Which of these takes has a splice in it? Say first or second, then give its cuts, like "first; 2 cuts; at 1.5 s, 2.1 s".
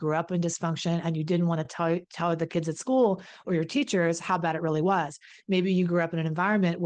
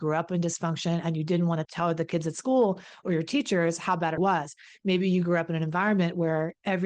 second; 2 cuts; at 1.6 s, 4.2 s